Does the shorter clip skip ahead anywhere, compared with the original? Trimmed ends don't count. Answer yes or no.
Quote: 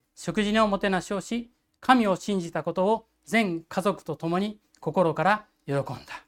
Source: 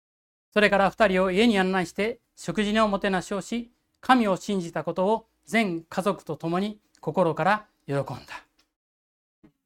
no